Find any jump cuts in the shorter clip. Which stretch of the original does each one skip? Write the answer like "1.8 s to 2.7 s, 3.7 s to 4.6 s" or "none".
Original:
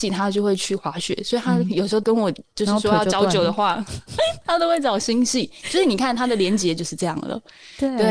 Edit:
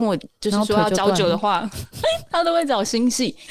none